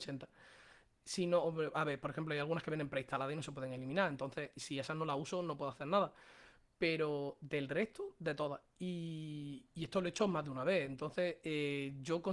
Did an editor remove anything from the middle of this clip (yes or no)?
yes